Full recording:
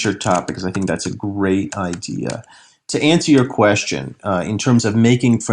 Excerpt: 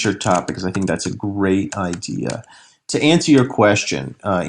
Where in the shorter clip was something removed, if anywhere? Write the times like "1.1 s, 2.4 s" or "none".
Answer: none